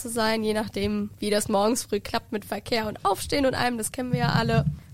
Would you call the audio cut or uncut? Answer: uncut